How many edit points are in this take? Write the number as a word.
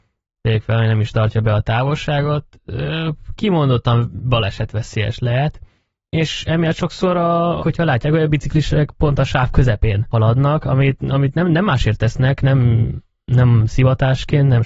one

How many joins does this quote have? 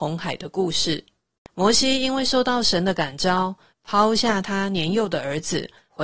two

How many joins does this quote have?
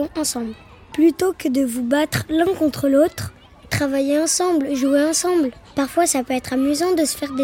one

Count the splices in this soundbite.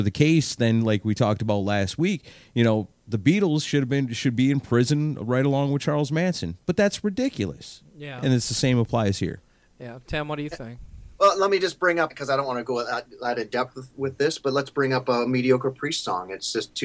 one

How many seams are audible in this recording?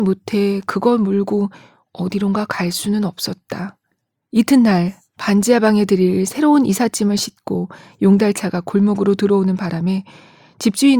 zero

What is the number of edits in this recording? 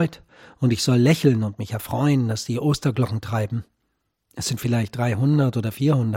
one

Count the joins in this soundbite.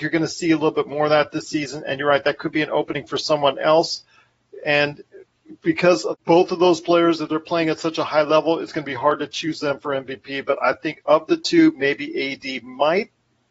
zero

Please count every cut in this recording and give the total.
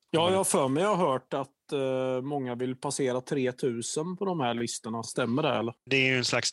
zero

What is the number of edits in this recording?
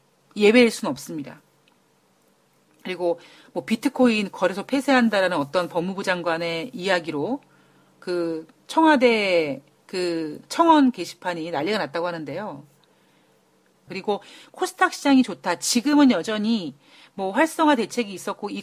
two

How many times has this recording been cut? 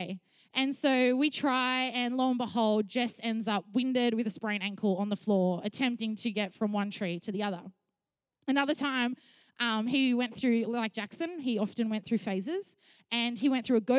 zero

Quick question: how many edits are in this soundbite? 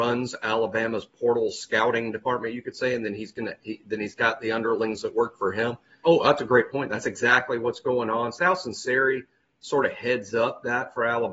one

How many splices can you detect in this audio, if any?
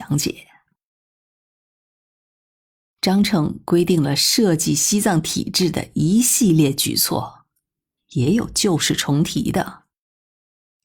two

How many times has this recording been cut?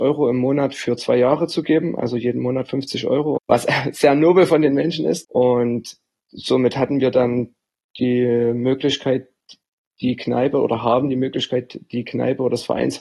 two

